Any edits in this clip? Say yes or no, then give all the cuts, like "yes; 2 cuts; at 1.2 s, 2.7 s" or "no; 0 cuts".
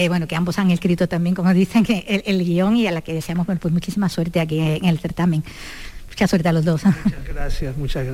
no; 0 cuts